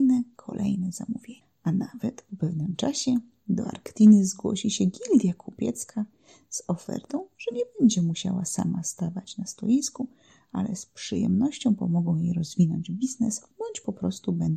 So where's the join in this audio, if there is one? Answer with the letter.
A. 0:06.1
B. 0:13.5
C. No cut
B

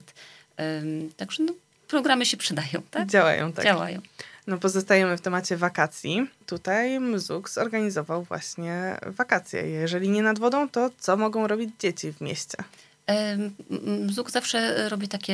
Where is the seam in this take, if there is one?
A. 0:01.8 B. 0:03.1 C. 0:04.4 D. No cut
D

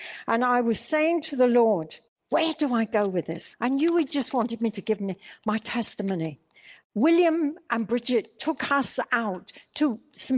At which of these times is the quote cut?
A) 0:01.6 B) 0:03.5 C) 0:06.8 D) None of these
B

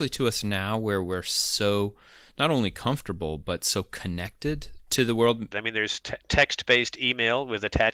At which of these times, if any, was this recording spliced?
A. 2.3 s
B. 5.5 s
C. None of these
B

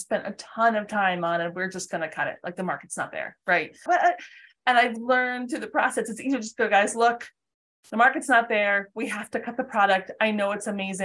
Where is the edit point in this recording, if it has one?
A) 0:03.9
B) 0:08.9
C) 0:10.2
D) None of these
A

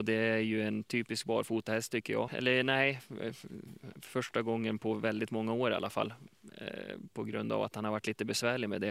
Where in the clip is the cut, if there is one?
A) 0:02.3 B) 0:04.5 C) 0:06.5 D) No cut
A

